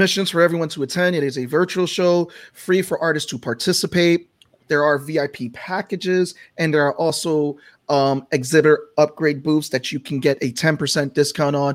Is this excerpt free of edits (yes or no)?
yes